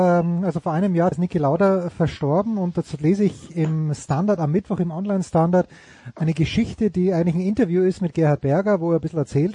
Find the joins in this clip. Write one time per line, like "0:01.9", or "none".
0:01.1